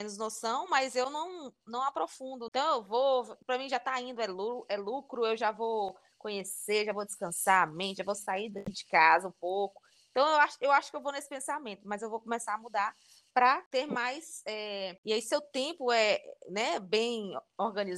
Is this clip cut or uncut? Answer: cut